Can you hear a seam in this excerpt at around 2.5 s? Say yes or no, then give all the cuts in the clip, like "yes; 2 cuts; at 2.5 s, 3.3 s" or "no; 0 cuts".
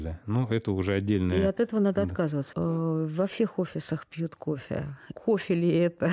yes; 2 cuts; at 2.5 s, 5.1 s